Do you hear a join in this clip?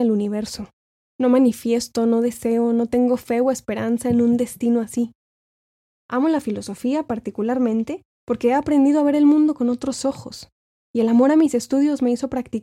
no; 0 cuts

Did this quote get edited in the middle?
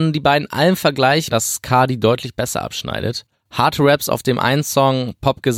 yes; 2 cuts; at 1.3 s, 3.3 s

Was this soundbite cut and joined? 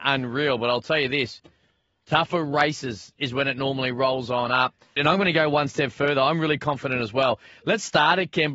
yes; 1 cut; at 5.0 s

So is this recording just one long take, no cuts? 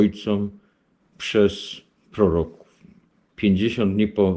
no; 1 cut; at 3.3 s

